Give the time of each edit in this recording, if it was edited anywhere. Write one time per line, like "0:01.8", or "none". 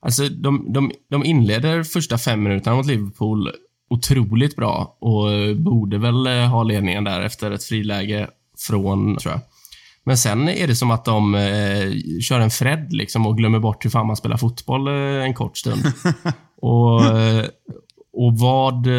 0:09.2